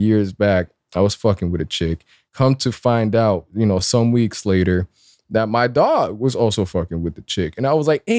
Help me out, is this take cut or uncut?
uncut